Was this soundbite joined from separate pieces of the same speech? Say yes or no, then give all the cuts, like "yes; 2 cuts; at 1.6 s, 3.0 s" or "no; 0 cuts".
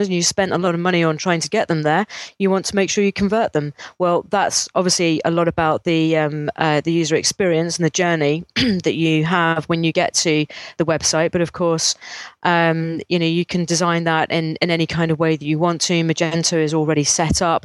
no; 0 cuts